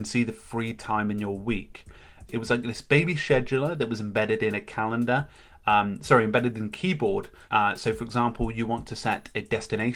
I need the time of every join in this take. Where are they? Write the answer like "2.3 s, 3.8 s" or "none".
2.3 s, 7.5 s